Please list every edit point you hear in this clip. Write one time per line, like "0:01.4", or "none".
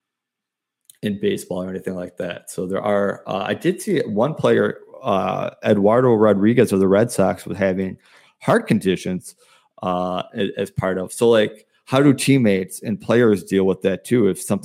none